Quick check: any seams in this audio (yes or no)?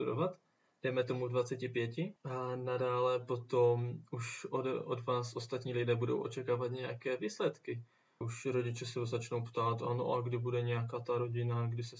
yes